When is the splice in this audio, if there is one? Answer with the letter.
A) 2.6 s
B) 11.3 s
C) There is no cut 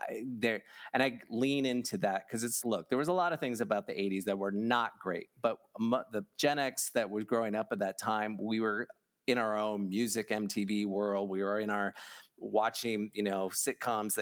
A